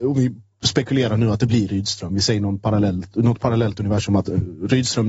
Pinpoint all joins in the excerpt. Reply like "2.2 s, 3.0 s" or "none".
none

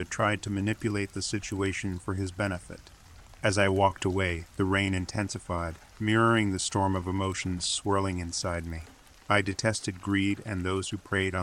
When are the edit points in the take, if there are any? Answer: none

